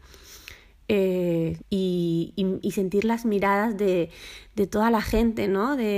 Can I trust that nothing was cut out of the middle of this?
no; 1 cut; at 1.6 s

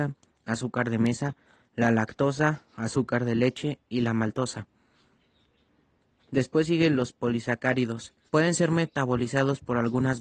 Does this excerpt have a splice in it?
yes; 1 cut; at 8.3 s

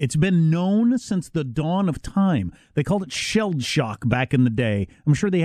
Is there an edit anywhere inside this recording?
no; 0 cuts

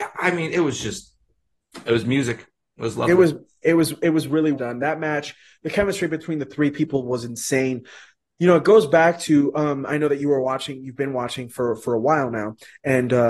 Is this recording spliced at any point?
yes; 1 cut; at 4.5 s

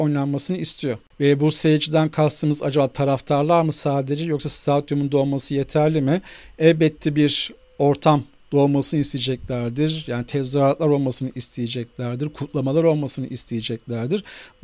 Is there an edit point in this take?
no; 0 cuts

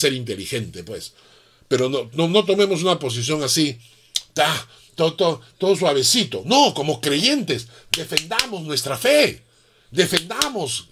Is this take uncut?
yes; 0 cuts

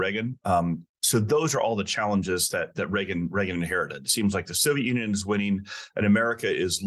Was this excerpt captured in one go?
no; 1 cut; at 0.9 s

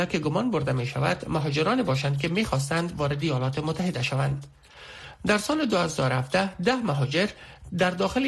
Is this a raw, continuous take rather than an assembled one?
no; 1 cut; at 5.1 s

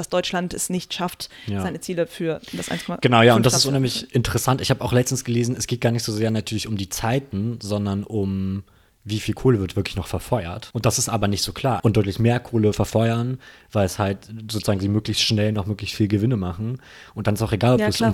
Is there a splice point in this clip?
yes; 2 cuts; at 10.7 s, 11.8 s

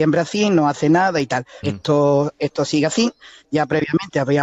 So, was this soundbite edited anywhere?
yes; 1 cut; at 1.6 s

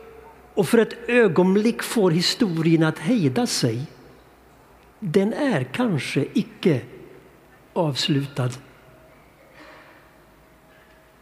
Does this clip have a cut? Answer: no; 0 cuts

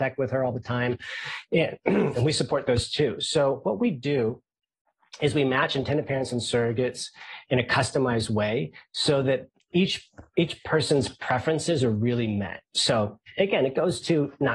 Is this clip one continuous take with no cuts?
no; 1 cut; at 12.6 s

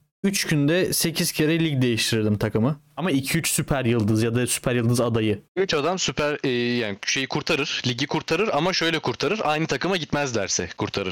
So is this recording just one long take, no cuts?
no; 2 cuts; at 3.0 s, 5.4 s

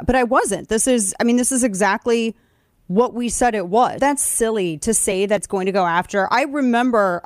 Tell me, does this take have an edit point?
yes; 1 cut; at 4.0 s

